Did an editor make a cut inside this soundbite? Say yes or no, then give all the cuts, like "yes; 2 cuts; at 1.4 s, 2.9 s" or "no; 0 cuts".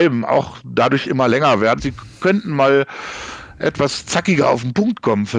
yes; 1 cut; at 1.8 s